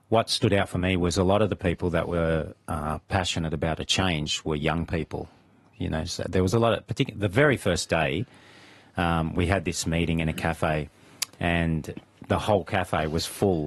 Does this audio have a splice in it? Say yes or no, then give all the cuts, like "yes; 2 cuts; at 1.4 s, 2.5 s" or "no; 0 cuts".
no; 0 cuts